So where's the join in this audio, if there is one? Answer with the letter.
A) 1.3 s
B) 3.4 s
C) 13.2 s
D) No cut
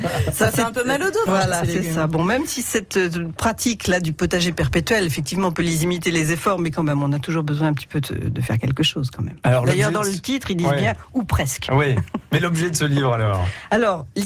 A